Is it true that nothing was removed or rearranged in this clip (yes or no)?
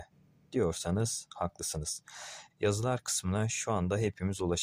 no